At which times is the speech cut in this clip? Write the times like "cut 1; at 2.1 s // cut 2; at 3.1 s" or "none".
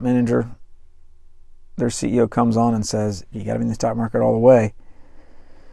cut 1; at 3.3 s